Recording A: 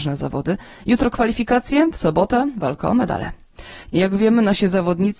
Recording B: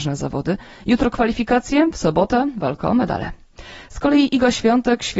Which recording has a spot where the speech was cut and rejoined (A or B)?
A